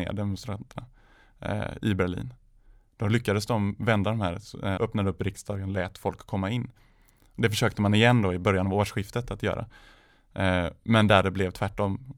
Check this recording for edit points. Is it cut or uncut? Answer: cut